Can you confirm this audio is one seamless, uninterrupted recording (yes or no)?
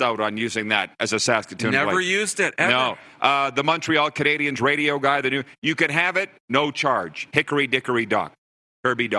yes